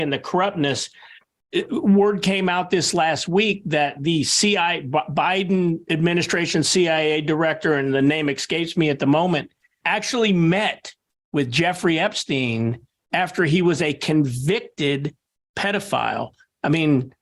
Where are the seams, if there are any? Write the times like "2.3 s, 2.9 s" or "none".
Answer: 9.8 s